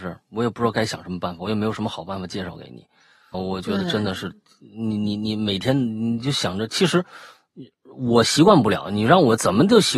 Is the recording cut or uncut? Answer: cut